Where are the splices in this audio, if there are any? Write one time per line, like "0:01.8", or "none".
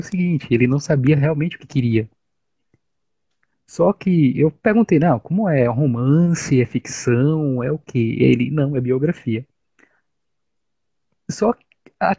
none